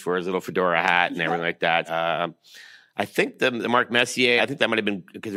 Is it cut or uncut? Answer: cut